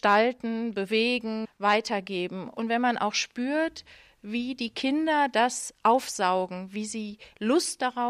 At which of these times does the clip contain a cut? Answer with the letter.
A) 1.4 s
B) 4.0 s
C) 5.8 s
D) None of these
A